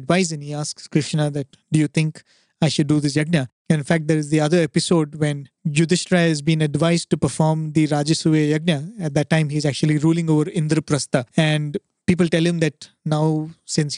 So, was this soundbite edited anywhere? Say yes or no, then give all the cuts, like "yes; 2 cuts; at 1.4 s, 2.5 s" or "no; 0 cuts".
yes; 1 cut; at 3.6 s